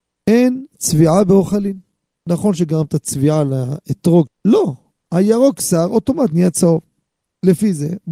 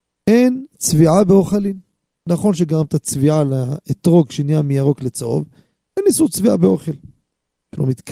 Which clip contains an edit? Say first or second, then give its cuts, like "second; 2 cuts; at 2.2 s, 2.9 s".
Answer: first; 1 cut; at 4.3 s